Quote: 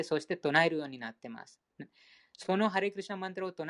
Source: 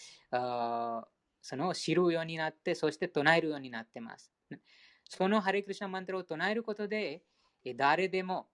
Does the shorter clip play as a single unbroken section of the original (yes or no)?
yes